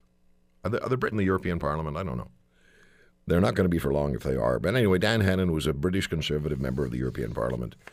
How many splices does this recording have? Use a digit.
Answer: 1